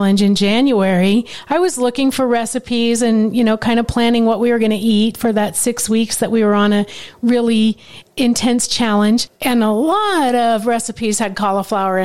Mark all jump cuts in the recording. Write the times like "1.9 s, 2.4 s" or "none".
none